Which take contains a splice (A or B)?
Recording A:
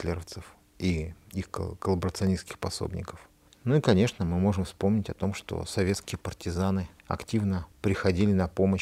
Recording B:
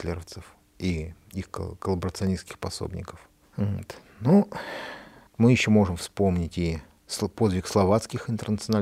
B